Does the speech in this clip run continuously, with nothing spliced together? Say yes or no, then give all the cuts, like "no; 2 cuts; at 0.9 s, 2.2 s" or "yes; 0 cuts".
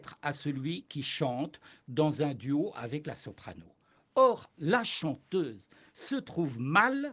no; 1 cut; at 4.5 s